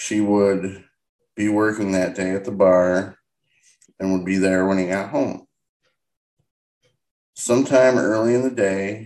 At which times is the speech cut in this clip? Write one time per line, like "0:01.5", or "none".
0:03.9